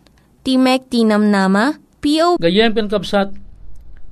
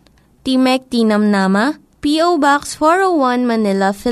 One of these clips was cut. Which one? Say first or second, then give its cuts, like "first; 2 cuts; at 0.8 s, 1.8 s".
first; 1 cut; at 2.4 s